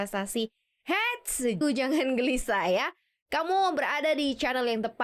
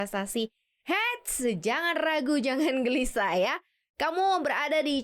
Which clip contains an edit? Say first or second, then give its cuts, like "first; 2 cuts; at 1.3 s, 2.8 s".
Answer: first; 1 cut; at 1.6 s